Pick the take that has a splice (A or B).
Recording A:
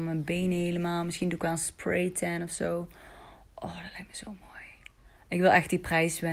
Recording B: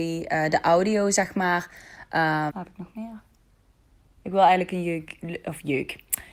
B